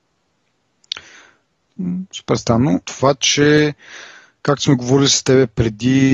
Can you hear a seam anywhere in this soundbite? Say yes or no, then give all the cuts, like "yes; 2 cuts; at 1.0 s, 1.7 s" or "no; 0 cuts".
yes; 1 cut; at 2.8 s